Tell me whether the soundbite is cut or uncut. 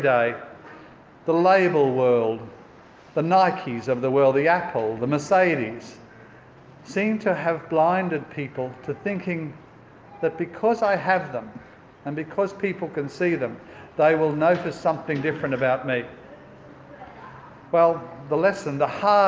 uncut